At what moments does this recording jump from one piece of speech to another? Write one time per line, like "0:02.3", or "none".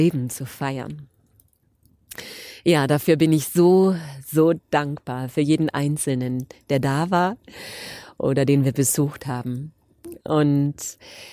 none